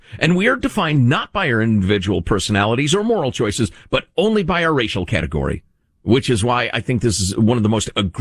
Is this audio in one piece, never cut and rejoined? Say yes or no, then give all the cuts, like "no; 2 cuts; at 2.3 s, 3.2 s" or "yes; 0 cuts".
yes; 0 cuts